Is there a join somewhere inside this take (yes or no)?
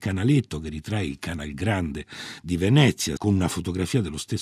yes